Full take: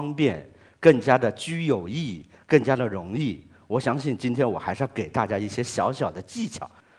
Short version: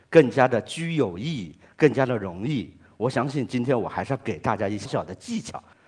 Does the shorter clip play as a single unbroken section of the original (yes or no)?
no